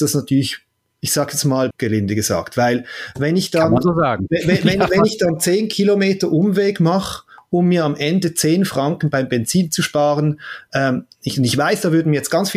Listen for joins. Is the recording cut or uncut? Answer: cut